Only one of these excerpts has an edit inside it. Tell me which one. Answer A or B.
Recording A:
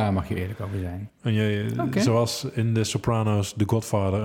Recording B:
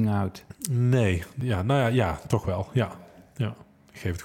A